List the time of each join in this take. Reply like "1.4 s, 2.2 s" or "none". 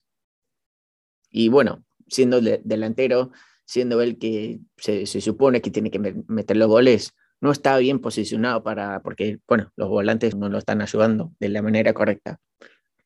9.0 s, 10.3 s